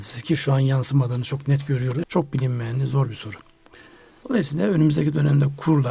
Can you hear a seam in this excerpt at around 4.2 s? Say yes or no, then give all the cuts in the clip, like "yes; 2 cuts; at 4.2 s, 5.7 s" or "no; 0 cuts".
yes; 2 cuts; at 2.0 s, 4.2 s